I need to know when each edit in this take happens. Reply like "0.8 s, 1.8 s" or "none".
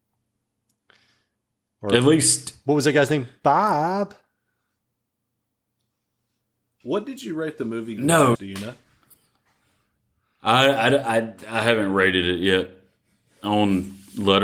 8.3 s

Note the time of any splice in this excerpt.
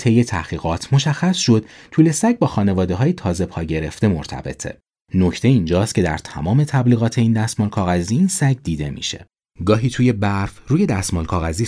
5.0 s

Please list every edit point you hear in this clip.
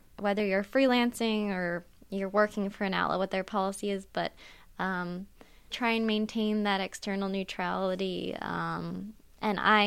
5.7 s

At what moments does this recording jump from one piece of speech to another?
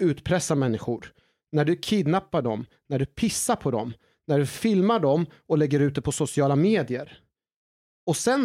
1.3 s

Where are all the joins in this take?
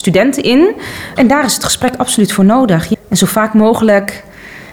1.2 s

